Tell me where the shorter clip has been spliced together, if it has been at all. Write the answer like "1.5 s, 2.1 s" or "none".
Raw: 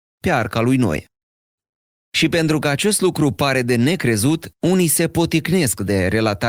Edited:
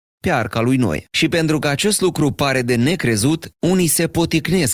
1.1 s

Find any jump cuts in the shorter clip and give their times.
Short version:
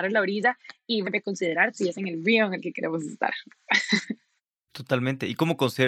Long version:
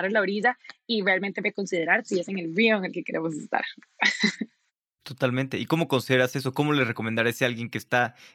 1.0 s

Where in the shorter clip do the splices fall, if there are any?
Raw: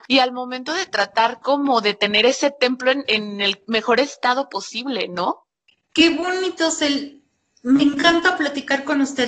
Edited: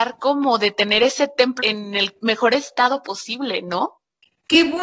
1.6 s

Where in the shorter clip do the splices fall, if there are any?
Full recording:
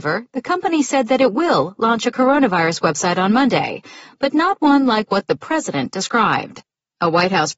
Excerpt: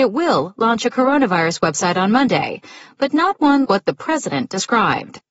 3.6 s

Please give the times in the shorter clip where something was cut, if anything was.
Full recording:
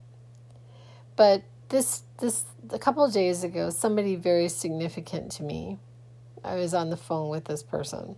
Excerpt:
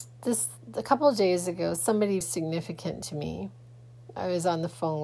2.2 s

